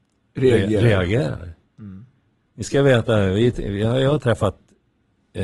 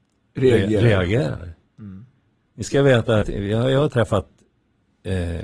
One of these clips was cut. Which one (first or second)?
second